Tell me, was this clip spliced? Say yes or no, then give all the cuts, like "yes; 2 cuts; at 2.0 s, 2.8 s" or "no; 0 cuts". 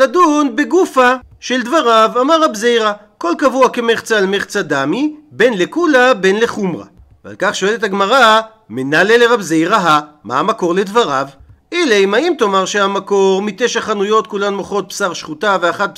no; 0 cuts